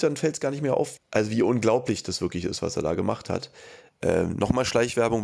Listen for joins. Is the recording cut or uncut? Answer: cut